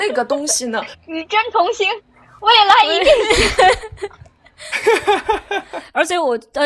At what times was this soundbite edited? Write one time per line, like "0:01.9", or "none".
0:00.9